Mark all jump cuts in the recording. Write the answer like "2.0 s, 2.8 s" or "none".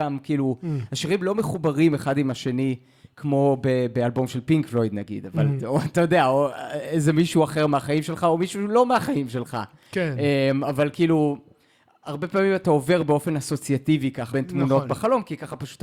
5.6 s, 14.3 s